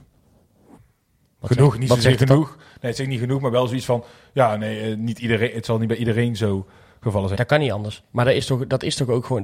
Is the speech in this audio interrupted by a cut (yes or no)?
yes